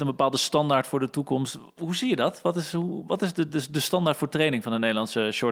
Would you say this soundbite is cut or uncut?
uncut